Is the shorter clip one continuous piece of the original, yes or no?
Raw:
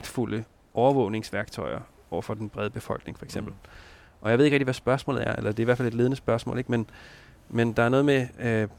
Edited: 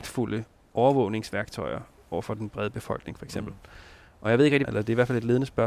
no